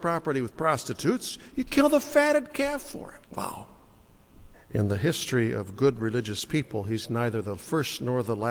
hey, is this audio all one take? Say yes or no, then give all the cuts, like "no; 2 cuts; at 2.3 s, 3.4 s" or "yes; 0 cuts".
no; 2 cuts; at 3.2 s, 4.5 s